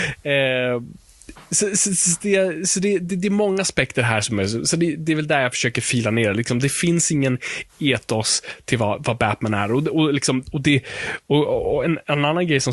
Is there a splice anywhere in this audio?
no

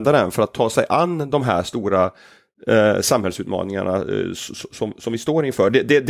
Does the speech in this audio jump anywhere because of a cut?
no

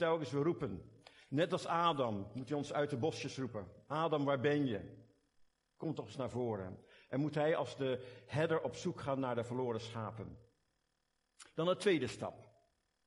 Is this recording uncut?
yes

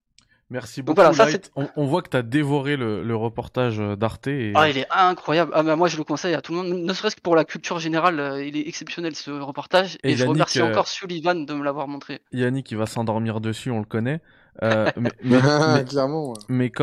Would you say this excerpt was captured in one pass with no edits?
yes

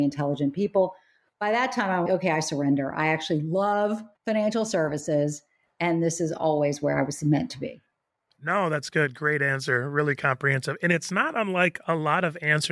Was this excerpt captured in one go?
no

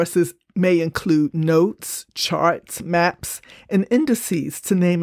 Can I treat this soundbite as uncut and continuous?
yes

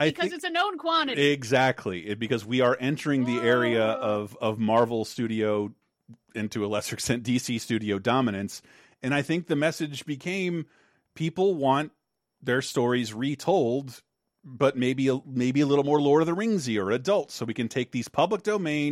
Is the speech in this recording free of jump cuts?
yes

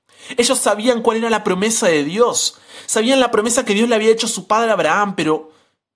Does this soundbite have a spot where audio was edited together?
no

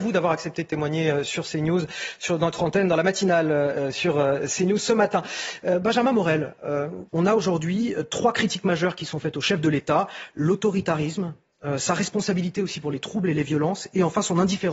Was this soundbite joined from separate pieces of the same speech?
yes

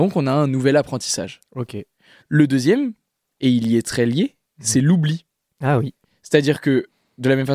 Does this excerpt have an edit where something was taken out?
yes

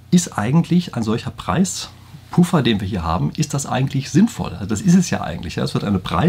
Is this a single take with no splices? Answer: yes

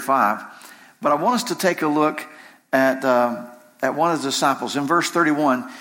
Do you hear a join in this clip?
no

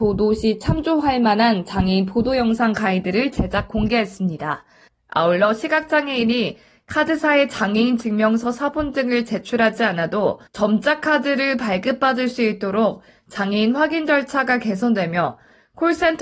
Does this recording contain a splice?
yes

